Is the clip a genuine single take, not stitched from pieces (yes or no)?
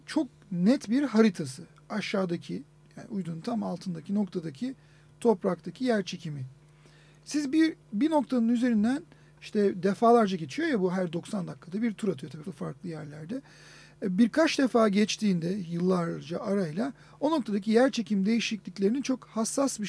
no